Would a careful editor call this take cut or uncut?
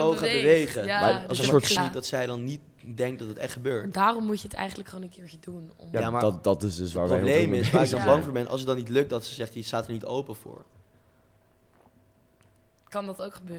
cut